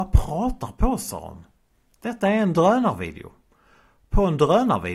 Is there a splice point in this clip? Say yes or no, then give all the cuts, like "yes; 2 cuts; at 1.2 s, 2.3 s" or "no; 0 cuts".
no; 0 cuts